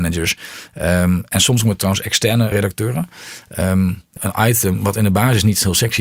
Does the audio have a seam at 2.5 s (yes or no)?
yes